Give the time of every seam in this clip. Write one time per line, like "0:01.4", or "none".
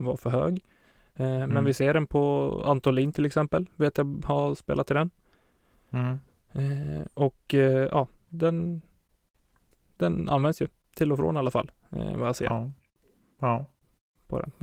none